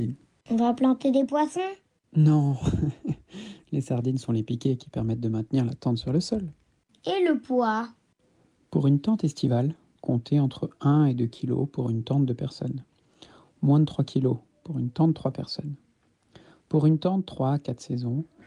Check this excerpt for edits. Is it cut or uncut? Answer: uncut